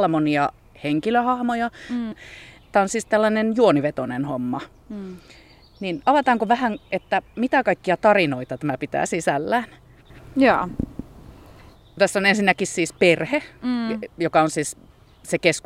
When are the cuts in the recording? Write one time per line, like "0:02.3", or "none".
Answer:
0:02.1